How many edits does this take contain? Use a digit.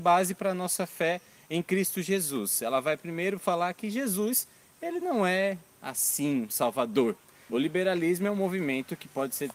1